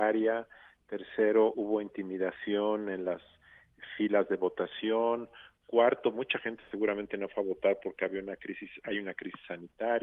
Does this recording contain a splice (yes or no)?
no